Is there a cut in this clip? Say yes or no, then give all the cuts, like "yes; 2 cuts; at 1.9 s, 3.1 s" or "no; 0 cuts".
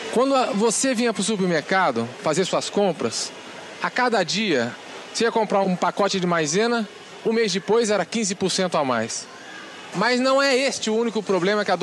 yes; 2 cuts; at 5.6 s, 9.9 s